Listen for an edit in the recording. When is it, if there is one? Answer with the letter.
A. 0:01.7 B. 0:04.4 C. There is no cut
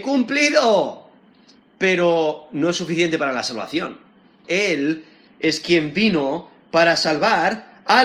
B